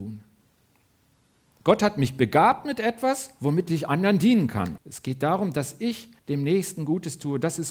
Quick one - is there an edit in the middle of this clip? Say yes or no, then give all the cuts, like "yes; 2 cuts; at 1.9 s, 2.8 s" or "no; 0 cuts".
yes; 3 cuts; at 1.5 s, 4.8 s, 6.2 s